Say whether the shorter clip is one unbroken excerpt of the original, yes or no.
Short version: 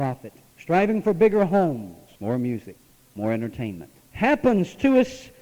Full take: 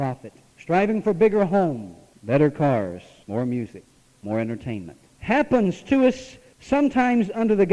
no